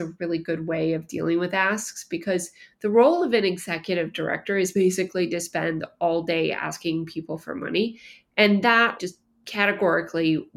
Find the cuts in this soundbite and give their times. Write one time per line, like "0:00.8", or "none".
0:09.0